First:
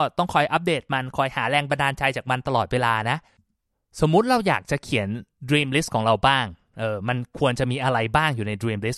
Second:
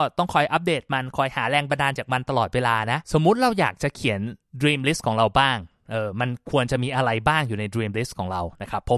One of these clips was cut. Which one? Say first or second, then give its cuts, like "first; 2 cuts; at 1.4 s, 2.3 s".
second; 2 cuts; at 2.0 s, 3.0 s